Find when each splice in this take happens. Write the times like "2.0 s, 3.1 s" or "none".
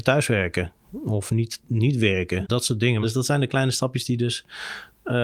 3.0 s